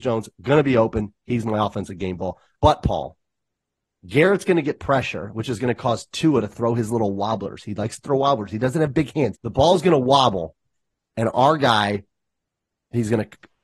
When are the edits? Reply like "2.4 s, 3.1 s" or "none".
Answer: 2.6 s, 9.3 s